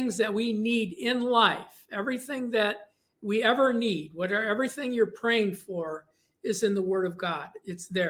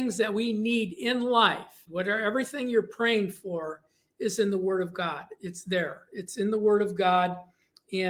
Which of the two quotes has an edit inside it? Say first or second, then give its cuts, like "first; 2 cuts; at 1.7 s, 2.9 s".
second; 1 cut; at 1.9 s